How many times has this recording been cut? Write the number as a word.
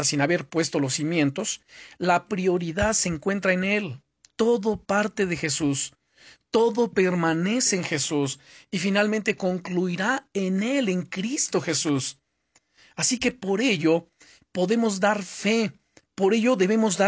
zero